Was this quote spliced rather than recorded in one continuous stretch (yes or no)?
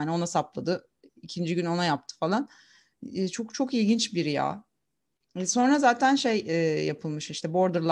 no